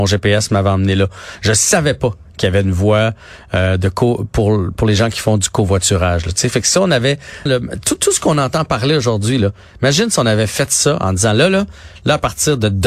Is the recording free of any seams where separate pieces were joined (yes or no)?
no